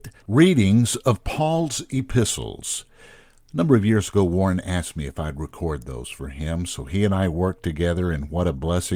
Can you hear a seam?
no; 0 cuts

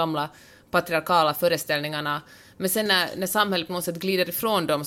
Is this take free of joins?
yes; 0 cuts

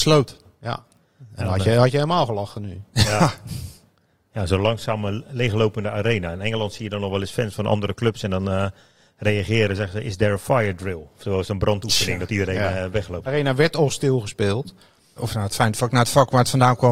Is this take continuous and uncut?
no; 2 cuts; at 13.3 s, 15.2 s

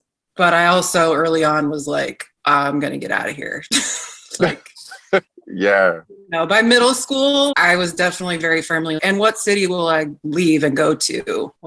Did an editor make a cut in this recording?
yes; 2 cuts; at 7.5 s, 9.0 s

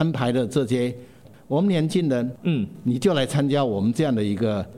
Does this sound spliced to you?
yes; 2 cuts; at 1.2 s, 2.4 s

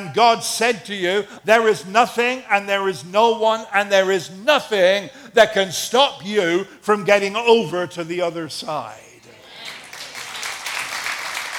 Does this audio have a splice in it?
yes; 1 cut; at 1.4 s

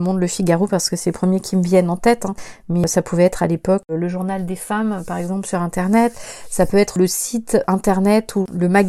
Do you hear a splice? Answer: no; 0 cuts

